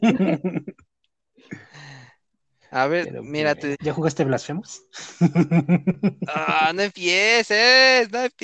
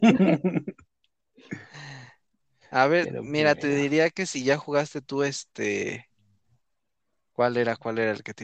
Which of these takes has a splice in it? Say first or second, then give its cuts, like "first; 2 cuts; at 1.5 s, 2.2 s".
first; 1 cut; at 3.7 s